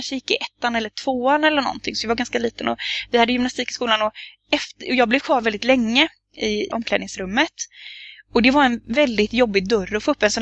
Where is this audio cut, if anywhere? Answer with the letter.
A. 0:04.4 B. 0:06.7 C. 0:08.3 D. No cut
B